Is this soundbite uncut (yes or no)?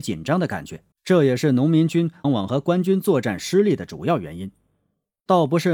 no